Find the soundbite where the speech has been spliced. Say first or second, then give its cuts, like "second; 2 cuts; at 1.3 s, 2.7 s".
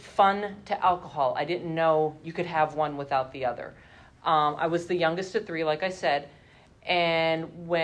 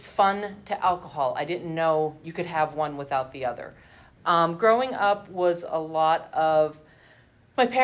second; 1 cut; at 4.1 s